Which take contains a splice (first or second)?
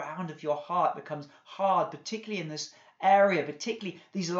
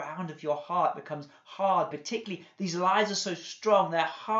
second